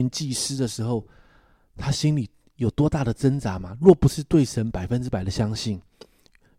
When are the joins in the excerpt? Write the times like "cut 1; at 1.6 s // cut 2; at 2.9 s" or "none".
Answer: none